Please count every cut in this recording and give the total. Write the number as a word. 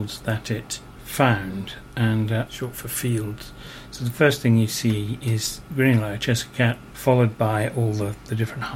three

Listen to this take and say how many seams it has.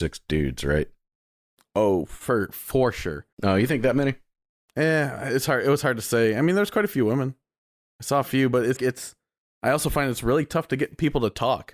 two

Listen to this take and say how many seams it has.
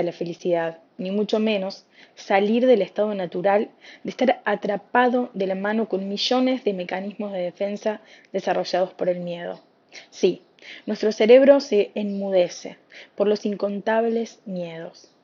zero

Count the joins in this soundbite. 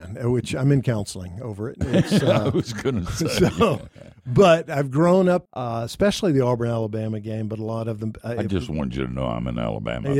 one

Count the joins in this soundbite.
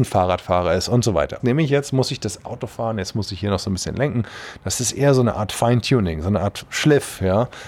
one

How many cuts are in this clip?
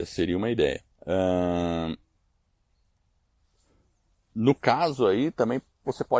one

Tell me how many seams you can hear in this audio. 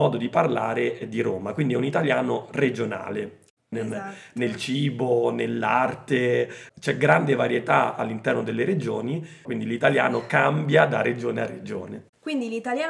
three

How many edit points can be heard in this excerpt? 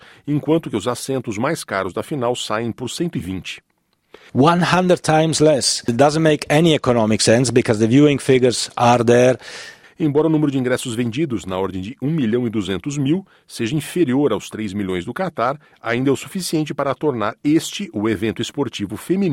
two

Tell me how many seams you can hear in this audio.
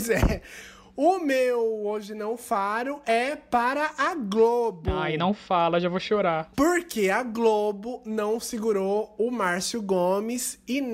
one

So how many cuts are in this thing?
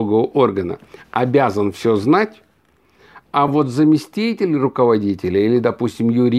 zero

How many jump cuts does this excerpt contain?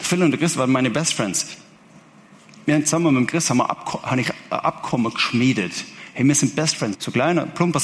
one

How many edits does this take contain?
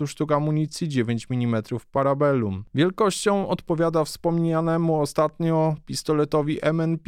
one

